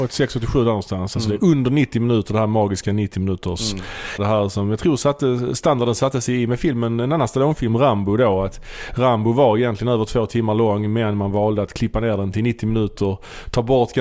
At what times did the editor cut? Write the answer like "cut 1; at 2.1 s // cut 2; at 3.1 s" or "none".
cut 1; at 4.2 s